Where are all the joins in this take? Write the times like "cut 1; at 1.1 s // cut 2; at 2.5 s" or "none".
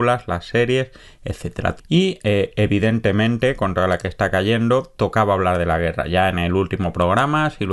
cut 1; at 1.8 s